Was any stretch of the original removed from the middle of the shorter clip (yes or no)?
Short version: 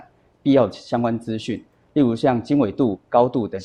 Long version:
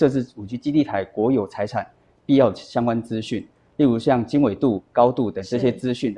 no